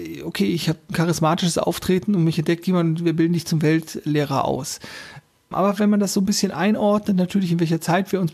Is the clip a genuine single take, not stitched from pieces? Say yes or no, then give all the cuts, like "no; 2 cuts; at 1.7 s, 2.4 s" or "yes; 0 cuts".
no; 1 cut; at 5.5 s